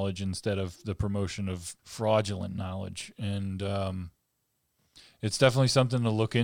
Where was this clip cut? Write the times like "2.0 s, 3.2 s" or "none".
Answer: 1.8 s